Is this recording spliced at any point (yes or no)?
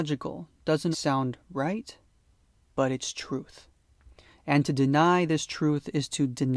yes